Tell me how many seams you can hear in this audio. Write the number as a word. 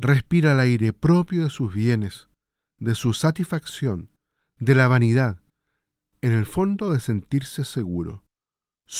zero